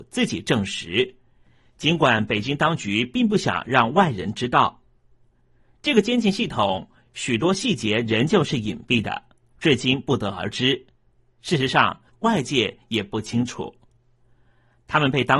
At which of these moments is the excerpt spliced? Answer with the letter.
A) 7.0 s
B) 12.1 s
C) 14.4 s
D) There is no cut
B